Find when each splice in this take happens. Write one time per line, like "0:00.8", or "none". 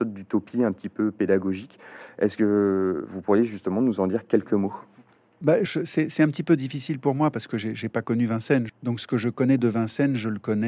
0:05.7
0:08.7